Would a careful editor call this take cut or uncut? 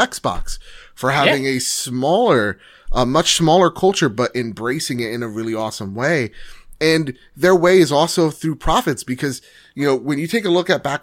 uncut